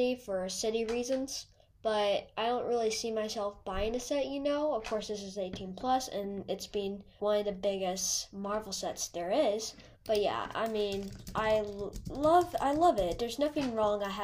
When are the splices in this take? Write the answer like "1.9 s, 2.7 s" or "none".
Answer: 7.2 s, 9.9 s